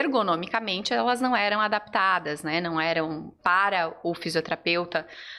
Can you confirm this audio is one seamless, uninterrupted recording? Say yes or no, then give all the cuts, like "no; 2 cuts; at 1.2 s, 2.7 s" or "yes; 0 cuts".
no; 1 cut; at 3.4 s